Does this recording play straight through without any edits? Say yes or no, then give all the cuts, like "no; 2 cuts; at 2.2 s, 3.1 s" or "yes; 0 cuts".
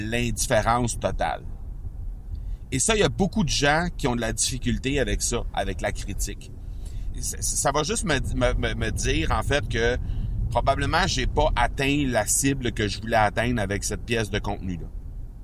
no; 1 cut; at 7.1 s